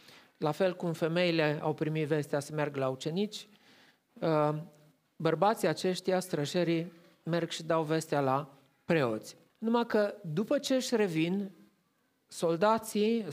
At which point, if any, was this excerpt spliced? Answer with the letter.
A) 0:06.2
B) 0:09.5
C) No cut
B